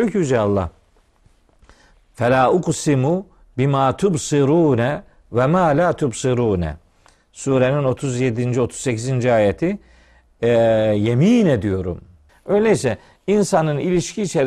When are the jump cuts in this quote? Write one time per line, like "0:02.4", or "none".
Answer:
0:12.3